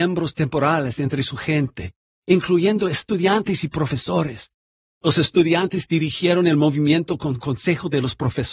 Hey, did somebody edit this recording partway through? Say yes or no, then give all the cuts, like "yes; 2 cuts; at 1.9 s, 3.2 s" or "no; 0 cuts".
no; 0 cuts